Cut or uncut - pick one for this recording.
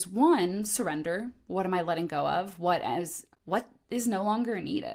cut